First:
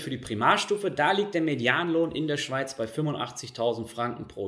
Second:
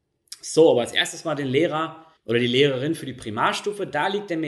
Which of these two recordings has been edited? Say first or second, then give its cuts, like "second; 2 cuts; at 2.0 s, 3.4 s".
second; 1 cut; at 2.2 s